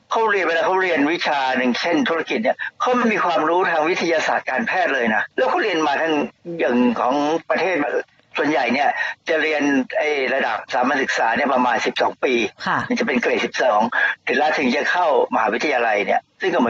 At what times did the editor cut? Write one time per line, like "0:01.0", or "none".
0:05.3